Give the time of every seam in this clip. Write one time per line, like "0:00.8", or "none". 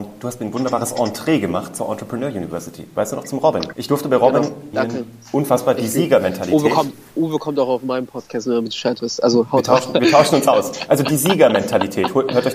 0:03.7
0:04.7